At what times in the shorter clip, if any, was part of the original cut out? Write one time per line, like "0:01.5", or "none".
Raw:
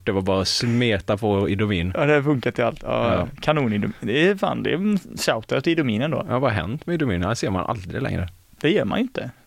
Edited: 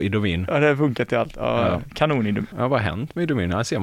0:02.5